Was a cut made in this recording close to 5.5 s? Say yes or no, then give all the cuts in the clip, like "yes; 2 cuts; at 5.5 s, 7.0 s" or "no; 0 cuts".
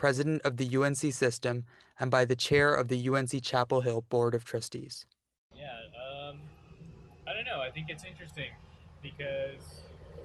yes; 1 cut; at 5.5 s